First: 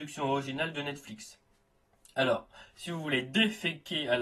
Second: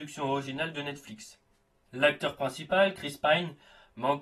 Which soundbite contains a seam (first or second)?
second